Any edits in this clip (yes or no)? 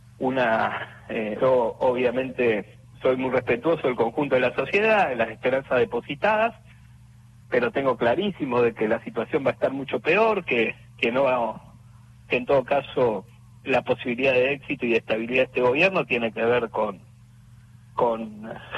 yes